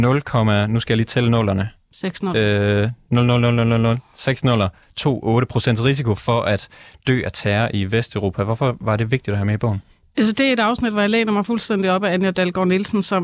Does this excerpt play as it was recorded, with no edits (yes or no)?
yes